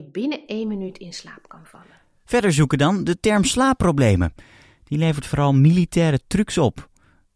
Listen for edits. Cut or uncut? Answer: uncut